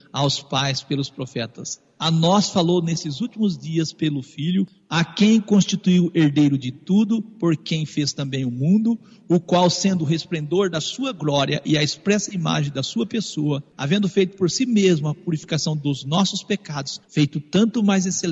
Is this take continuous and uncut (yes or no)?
no